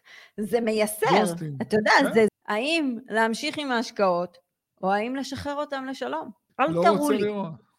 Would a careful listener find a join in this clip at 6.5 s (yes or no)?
yes